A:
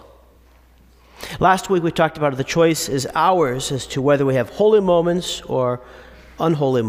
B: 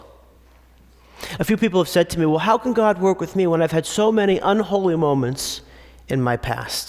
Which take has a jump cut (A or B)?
B